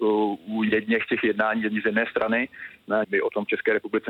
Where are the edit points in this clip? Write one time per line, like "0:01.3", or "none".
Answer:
0:03.0